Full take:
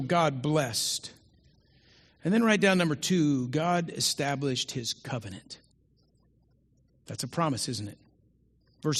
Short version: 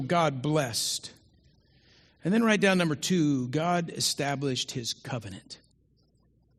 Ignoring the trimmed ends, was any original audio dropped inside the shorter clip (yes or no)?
no